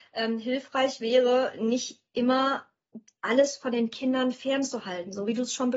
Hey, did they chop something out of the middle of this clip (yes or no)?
no